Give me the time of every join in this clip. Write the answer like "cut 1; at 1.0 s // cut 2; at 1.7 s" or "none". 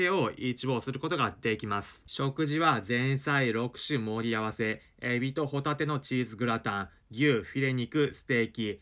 cut 1; at 2.0 s